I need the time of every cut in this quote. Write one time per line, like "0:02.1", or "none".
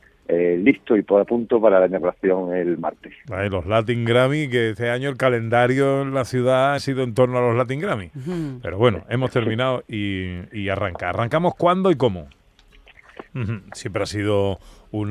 0:06.8
0:13.2